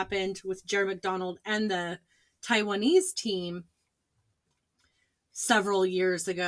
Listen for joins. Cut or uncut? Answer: uncut